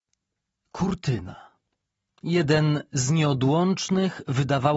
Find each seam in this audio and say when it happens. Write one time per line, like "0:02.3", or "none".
none

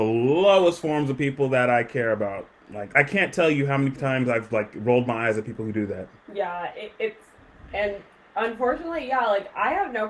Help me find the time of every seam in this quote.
0:02.9

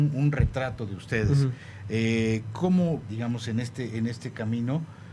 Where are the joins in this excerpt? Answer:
0:03.0

